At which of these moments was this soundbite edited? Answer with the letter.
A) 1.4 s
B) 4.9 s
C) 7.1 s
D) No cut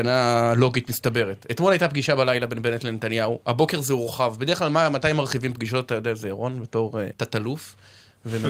C